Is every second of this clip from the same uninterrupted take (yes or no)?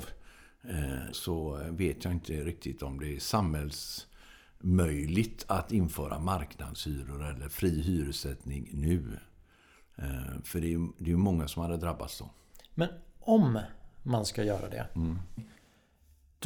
no